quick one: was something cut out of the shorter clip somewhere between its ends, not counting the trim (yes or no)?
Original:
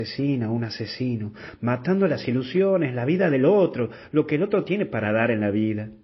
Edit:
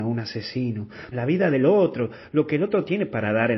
yes